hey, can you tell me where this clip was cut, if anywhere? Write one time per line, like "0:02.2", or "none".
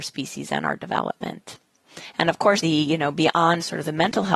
0:02.6